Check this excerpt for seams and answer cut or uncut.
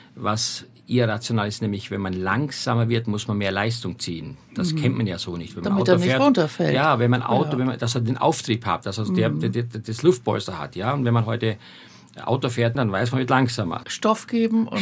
cut